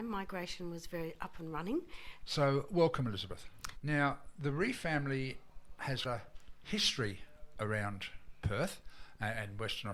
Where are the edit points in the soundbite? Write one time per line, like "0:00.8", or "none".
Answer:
0:02.2
0:03.8
0:06.0